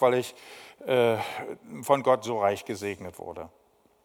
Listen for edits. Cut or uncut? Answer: uncut